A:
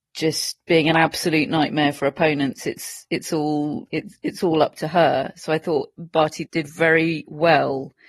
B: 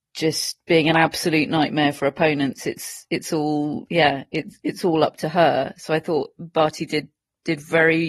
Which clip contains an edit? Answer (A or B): A